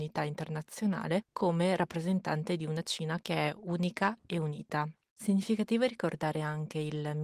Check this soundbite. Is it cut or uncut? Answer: cut